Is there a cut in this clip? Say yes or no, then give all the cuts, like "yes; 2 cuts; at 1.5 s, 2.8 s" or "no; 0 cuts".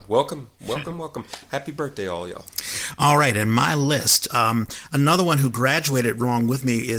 yes; 1 cut; at 4.3 s